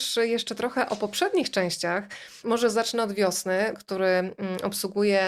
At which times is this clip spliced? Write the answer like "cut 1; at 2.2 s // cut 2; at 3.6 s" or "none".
cut 1; at 2.4 s // cut 2; at 3.7 s